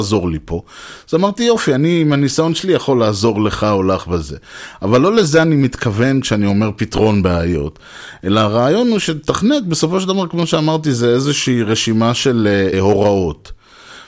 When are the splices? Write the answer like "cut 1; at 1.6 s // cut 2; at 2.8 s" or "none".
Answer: cut 1; at 12.7 s